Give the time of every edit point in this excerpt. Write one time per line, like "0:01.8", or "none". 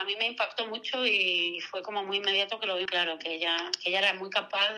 0:02.9